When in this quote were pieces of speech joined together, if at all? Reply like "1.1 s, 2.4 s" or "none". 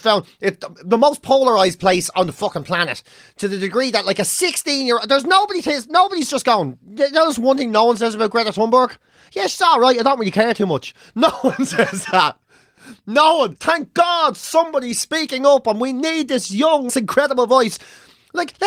13.6 s, 16.9 s